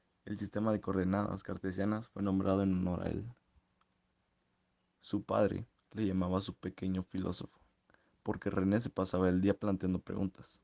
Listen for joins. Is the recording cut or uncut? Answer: cut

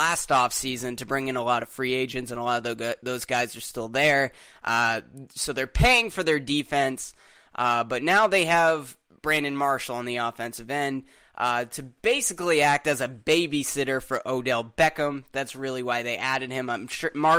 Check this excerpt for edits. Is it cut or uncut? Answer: uncut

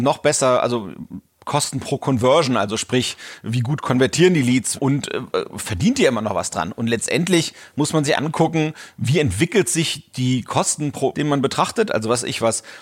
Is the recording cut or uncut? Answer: cut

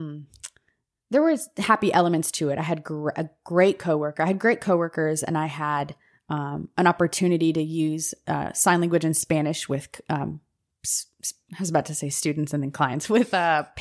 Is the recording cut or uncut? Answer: uncut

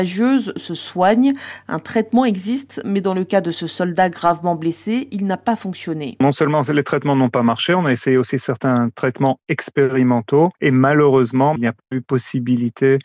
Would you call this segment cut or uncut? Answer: uncut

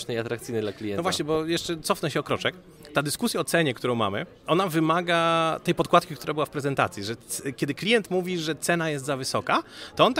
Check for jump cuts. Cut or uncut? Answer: uncut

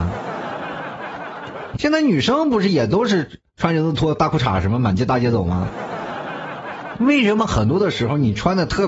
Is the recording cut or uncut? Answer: cut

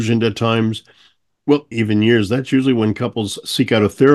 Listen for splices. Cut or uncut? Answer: cut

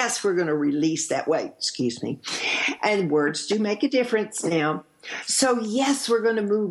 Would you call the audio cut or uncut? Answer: uncut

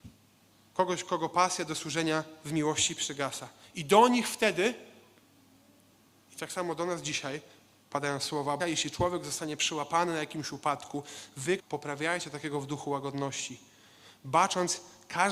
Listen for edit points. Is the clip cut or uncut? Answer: cut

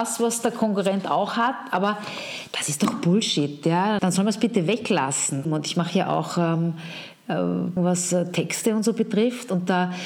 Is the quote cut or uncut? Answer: cut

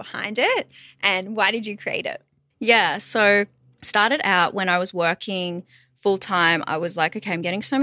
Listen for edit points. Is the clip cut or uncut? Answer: uncut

